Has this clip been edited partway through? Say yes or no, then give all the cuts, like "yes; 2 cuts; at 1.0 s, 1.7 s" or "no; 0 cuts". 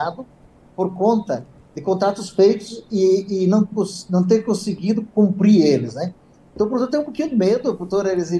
no; 0 cuts